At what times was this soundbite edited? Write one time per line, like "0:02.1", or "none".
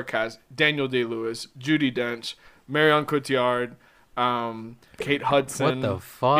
0:05.0